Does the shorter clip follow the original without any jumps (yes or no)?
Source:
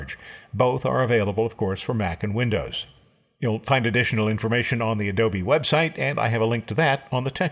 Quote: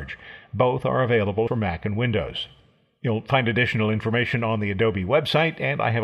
no